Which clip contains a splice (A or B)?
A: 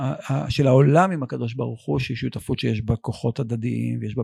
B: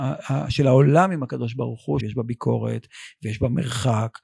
B